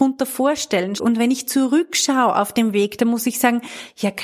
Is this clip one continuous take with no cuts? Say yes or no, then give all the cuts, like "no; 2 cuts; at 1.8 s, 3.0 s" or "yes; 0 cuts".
no; 1 cut; at 1.0 s